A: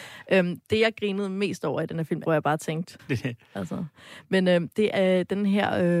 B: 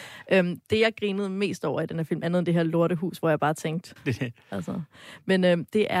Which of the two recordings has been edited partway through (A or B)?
A